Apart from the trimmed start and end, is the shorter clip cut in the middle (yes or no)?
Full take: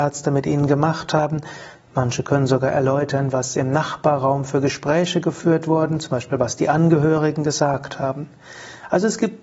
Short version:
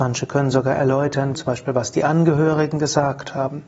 yes